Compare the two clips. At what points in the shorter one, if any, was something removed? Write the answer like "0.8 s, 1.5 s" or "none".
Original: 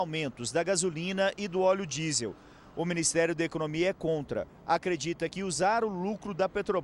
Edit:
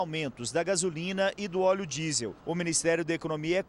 2.4 s